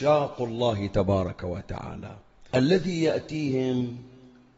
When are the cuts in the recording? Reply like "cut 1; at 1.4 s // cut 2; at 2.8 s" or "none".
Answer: cut 1; at 2.5 s